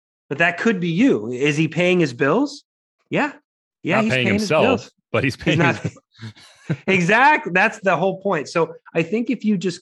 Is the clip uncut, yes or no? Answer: yes